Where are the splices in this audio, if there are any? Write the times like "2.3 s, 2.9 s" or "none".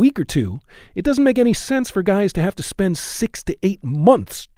none